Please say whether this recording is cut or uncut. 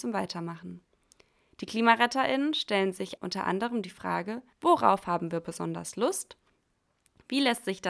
cut